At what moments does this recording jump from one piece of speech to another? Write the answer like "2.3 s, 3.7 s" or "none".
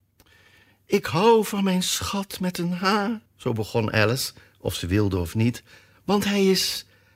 3.3 s

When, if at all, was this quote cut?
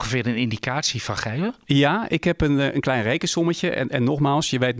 none

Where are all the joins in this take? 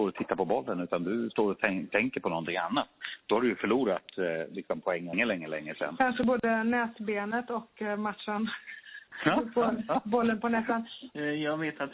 none

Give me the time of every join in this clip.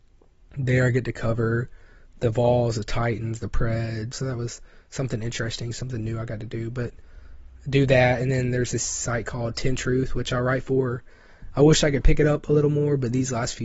4.1 s

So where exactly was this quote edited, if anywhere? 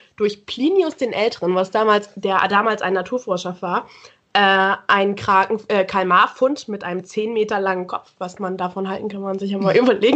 9.1 s

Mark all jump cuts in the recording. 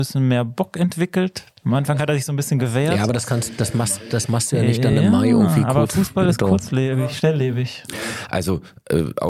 none

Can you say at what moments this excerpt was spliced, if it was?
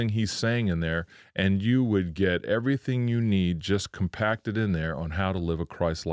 none

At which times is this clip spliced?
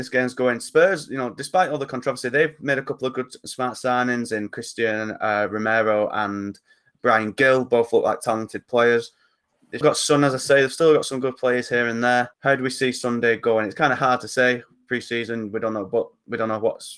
9.8 s, 12.3 s

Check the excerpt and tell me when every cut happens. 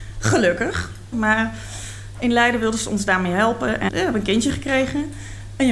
1.1 s, 3.9 s

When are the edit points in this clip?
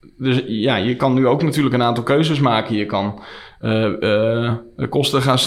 none

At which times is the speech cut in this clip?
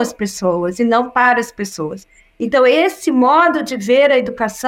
none

